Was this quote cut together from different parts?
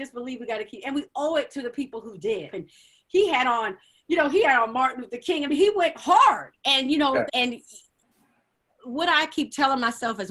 yes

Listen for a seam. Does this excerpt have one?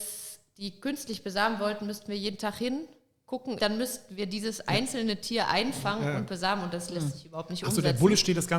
yes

